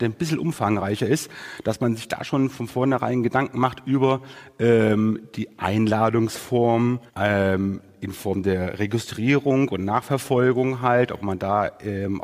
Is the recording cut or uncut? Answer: cut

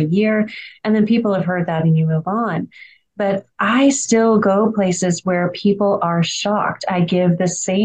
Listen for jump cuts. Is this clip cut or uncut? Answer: uncut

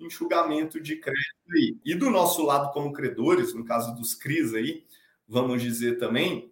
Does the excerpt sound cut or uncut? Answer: cut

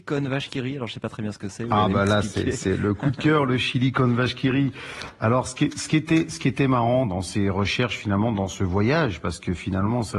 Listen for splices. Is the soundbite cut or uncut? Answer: uncut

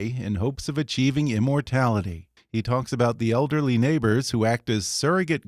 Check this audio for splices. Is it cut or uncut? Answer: cut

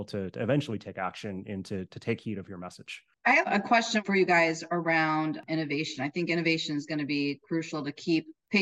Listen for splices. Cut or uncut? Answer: uncut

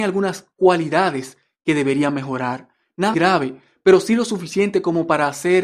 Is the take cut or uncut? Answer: cut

